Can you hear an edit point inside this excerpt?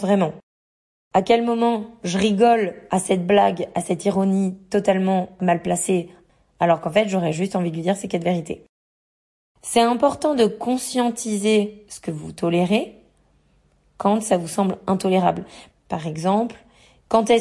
yes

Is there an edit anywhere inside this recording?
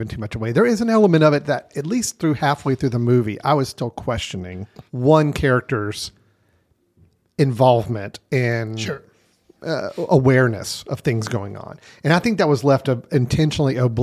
yes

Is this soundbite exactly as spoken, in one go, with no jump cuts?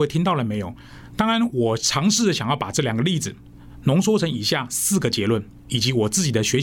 yes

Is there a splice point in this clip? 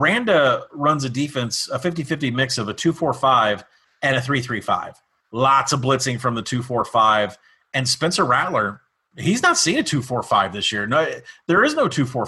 no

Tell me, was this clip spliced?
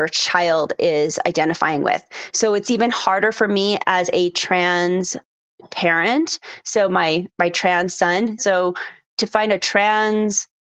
yes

